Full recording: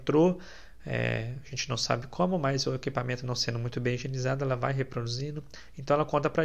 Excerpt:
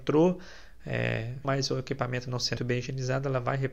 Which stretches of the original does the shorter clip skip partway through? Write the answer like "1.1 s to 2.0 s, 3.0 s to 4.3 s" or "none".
1.4 s to 2.4 s, 3.5 s to 3.7 s